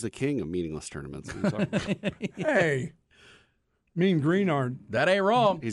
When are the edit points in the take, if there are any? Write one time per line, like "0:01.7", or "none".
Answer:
none